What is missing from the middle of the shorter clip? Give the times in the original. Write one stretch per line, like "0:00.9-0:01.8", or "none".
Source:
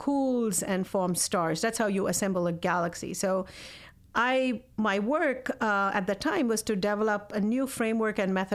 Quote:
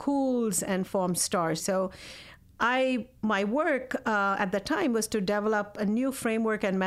0:01.6-0:03.2